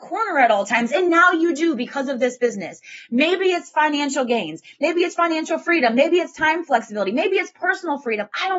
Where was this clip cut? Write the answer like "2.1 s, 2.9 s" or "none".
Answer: none